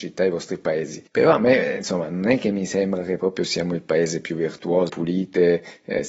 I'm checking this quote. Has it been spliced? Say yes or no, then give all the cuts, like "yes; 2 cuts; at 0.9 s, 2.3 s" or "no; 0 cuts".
yes; 2 cuts; at 1.1 s, 4.9 s